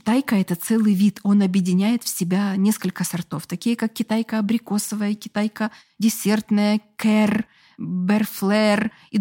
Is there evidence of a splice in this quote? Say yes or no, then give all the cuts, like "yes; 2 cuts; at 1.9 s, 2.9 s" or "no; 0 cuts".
no; 0 cuts